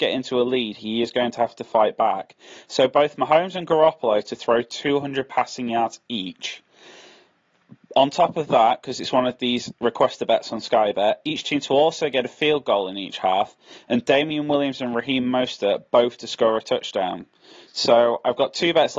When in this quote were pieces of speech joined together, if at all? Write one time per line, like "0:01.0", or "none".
0:17.7